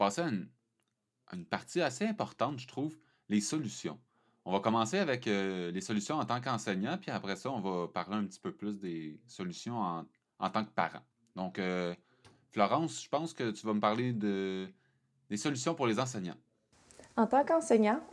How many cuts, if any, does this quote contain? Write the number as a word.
zero